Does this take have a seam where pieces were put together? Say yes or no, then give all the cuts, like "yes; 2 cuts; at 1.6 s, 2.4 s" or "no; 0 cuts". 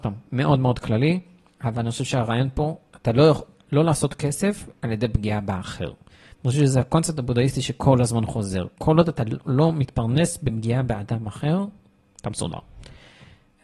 no; 0 cuts